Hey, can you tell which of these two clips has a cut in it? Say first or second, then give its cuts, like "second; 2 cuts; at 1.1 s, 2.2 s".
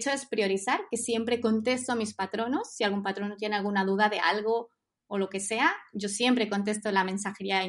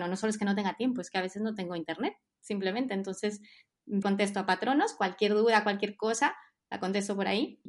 second; 1 cut; at 4.0 s